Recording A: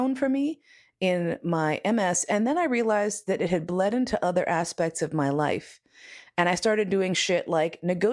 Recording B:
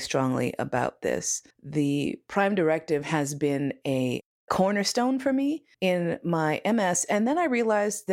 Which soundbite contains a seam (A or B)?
B